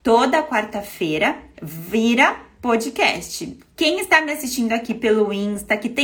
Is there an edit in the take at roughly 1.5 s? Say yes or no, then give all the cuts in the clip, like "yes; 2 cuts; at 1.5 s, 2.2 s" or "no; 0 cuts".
yes; 2 cuts; at 1.5 s, 3.6 s